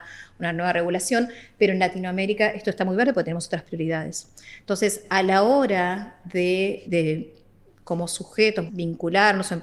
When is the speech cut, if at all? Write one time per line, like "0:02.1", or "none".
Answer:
0:06.8
0:08.7